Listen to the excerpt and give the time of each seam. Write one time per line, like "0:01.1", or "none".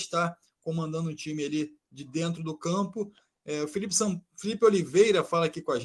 none